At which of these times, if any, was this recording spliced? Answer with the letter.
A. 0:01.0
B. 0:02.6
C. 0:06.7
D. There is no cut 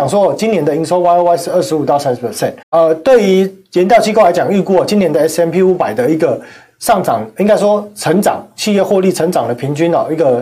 B